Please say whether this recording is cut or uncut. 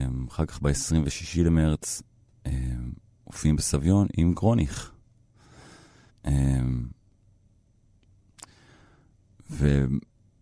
cut